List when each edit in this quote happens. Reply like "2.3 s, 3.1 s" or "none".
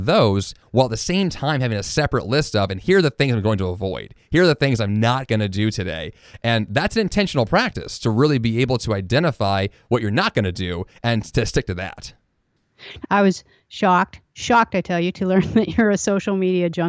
13.0 s